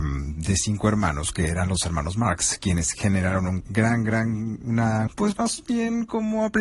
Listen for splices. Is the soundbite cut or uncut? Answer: cut